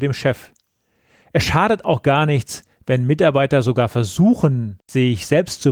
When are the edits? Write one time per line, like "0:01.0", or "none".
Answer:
0:04.8